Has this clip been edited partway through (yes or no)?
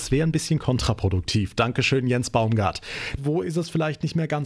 yes